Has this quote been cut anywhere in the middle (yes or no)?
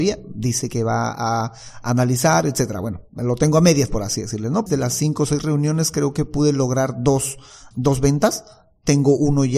yes